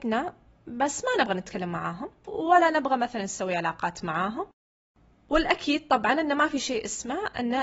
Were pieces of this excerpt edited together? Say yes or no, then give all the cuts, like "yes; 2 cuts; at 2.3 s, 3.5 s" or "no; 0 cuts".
no; 0 cuts